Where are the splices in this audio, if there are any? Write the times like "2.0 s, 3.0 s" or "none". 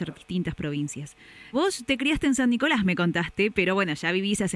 1.5 s